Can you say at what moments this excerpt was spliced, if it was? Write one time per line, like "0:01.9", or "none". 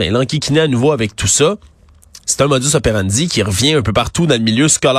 0:02.2